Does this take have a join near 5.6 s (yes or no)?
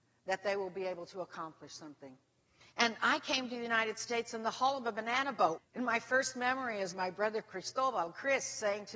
yes